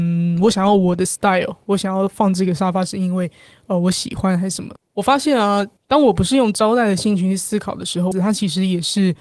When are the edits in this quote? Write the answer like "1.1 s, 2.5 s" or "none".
4.8 s, 8.1 s